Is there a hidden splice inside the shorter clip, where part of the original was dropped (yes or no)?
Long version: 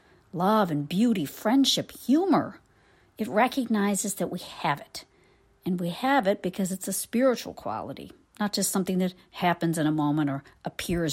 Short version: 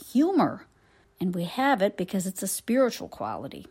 yes